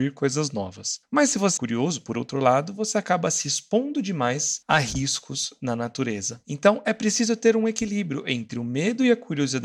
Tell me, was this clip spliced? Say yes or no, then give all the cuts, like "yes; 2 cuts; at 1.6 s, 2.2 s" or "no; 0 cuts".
yes; 1 cut; at 1.6 s